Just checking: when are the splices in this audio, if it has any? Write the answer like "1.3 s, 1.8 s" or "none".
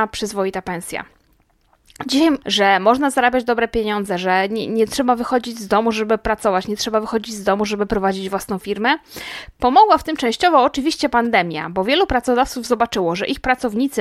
2.4 s